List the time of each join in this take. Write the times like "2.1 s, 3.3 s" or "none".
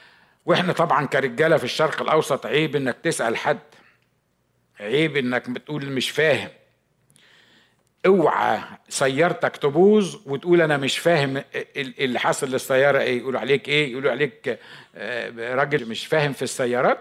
15.8 s